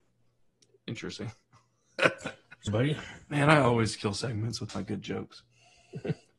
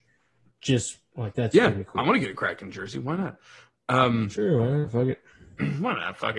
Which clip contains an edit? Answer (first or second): first